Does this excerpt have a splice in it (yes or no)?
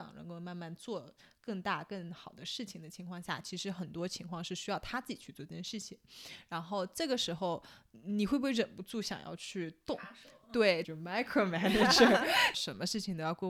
yes